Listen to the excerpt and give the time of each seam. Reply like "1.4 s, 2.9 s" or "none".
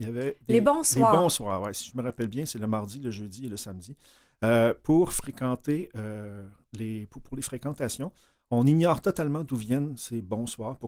none